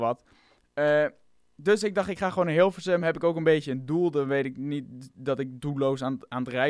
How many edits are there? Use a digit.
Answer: 0